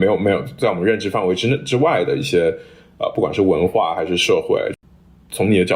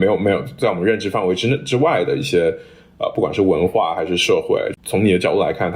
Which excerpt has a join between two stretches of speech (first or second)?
second